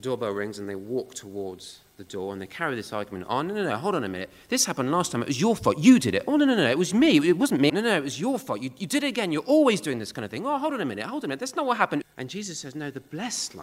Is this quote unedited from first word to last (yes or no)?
no